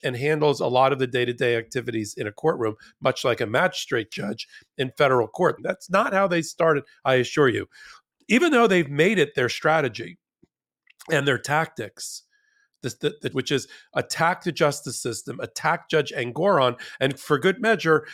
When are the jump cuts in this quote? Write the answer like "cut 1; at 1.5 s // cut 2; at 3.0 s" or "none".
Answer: cut 1; at 5.6 s // cut 2; at 13.3 s